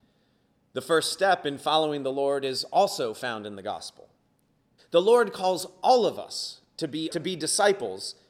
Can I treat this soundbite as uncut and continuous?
no; 2 cuts; at 4.8 s, 7.1 s

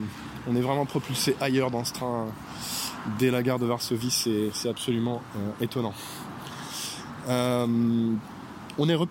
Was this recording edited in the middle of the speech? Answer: no; 0 cuts

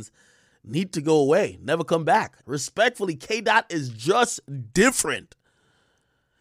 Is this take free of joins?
no; 1 cut; at 2.4 s

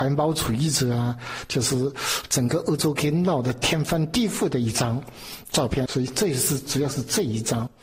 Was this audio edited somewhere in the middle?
yes; 1 cut; at 5.9 s

